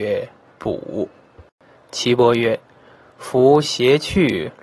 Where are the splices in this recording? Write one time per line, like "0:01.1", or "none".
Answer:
0:01.8